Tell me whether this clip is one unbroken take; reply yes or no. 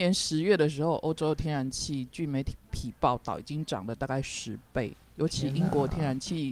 yes